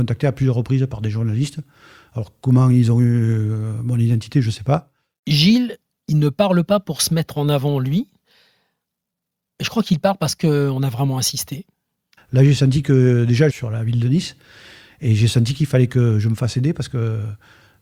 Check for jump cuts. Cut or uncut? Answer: cut